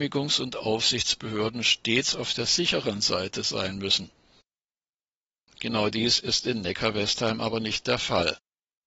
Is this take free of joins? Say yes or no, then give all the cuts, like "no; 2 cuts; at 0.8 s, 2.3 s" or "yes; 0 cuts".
yes; 0 cuts